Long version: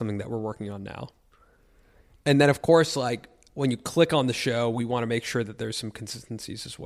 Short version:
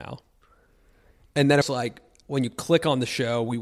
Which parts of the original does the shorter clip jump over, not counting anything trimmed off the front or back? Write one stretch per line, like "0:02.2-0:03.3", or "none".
0:02.5-0:02.9